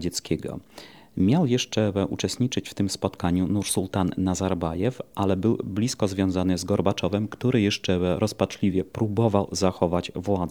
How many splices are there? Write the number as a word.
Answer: zero